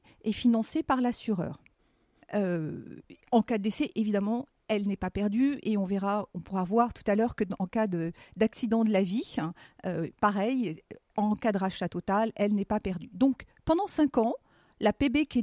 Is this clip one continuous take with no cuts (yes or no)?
no